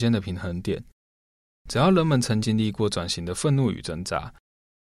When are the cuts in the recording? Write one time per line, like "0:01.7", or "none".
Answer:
0:02.4